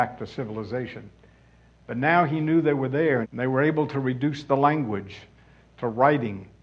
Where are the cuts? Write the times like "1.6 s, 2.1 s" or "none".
3.2 s